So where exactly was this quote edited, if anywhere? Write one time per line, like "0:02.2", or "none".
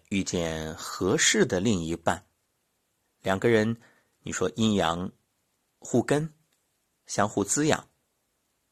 none